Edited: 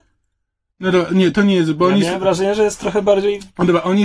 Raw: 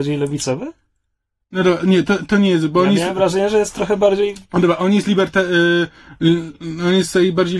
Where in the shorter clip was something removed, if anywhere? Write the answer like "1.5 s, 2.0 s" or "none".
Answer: 1.3 s